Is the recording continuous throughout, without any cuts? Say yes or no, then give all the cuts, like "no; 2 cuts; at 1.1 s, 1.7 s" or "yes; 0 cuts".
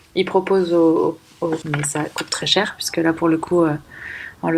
no; 1 cut; at 1.6 s